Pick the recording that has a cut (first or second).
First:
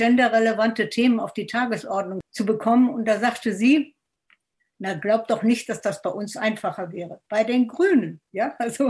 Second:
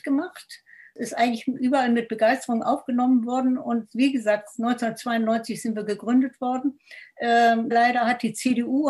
second